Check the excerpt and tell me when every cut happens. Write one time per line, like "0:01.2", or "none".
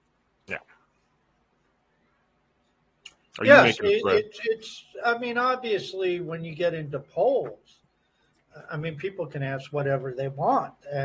none